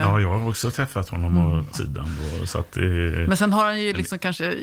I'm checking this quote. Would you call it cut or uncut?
cut